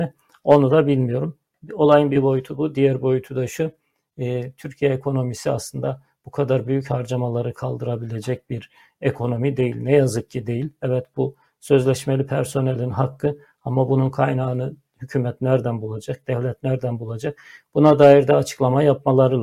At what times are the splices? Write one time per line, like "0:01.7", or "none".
none